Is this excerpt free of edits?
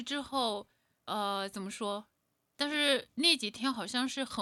no; 1 cut; at 2.5 s

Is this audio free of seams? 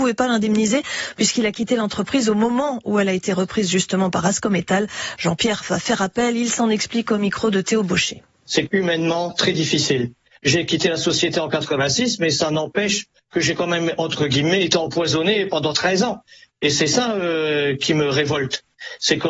yes; 0 cuts

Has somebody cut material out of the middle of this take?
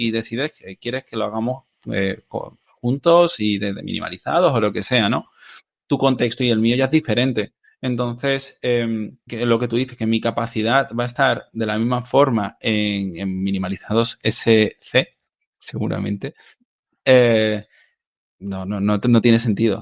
yes; 1 cut; at 9.3 s

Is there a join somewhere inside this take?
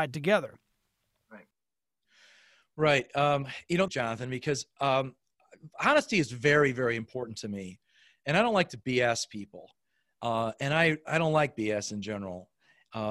yes; 1 cut; at 3.9 s

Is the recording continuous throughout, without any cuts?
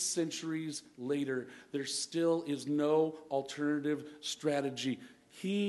yes; 0 cuts

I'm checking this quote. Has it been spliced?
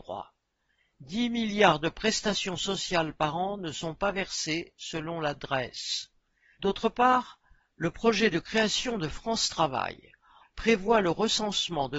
yes; 2 cuts; at 6.5 s, 10.4 s

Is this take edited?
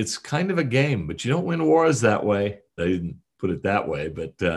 yes; 1 cut; at 2.8 s

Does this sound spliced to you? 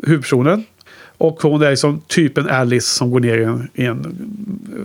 no; 0 cuts

